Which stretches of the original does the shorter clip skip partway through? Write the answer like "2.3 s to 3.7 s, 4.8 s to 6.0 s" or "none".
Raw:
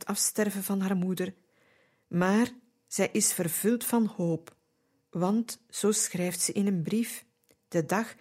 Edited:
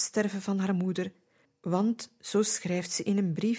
1.7 s to 4.9 s